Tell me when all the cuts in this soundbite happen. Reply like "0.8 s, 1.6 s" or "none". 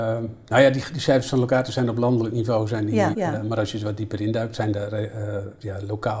3.1 s